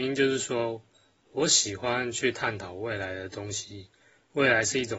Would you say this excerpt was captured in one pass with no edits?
yes; 0 cuts

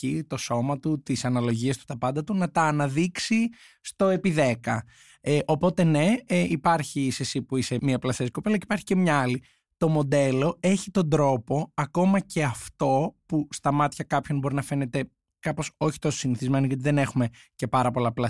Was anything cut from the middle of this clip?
no; 0 cuts

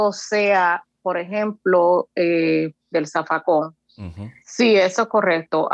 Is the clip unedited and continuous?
no; 2 cuts; at 2.9 s, 4.4 s

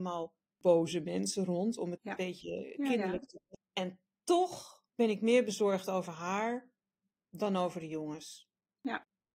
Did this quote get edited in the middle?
yes; 3 cuts; at 2.0 s, 3.5 s, 4.9 s

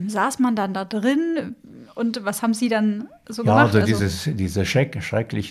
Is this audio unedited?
yes; 0 cuts

